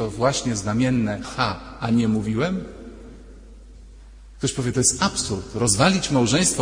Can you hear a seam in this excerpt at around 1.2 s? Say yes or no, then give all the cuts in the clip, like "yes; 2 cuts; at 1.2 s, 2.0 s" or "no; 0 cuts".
yes; 1 cut; at 1.2 s